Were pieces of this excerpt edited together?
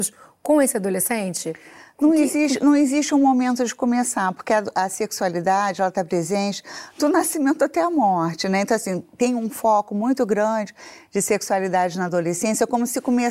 no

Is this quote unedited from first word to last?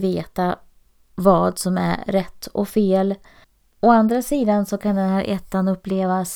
yes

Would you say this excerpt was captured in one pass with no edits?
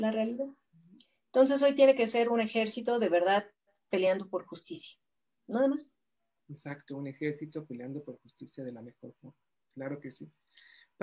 yes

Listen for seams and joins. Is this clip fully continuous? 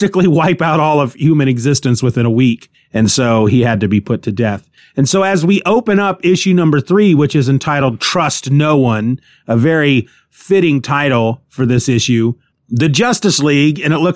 yes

